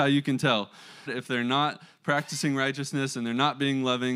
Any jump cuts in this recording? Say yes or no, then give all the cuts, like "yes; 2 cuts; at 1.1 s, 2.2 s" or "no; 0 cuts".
yes; 1 cut; at 1.1 s